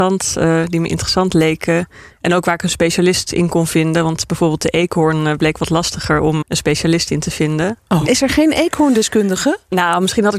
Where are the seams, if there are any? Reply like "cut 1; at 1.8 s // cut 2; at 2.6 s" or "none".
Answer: cut 1; at 6.4 s // cut 2; at 8.1 s